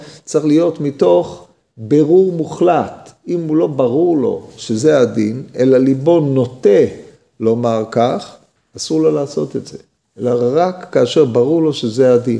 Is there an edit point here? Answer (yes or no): no